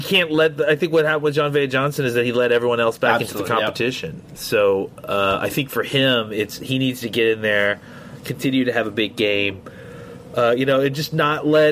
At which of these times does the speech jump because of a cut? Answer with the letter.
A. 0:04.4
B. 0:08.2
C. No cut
A